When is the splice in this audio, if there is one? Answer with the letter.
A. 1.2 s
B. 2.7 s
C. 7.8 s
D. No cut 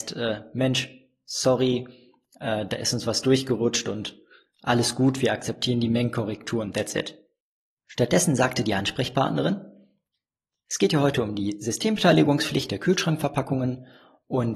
C